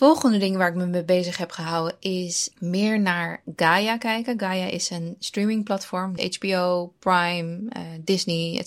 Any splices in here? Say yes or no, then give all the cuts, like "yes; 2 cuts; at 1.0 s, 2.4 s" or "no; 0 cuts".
yes; 1 cut; at 6.2 s